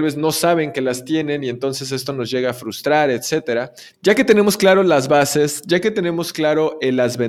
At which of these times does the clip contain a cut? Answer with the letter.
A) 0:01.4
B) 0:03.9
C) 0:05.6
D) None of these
B